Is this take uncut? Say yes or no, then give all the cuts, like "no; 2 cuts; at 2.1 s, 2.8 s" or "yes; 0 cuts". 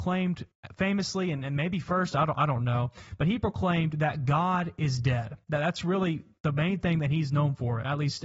yes; 0 cuts